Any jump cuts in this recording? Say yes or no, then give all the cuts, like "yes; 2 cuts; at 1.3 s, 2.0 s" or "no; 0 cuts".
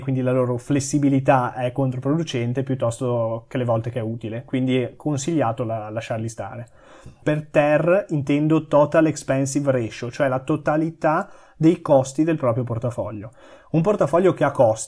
yes; 1 cut; at 7.2 s